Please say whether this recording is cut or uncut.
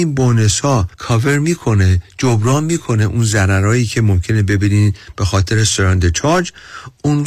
cut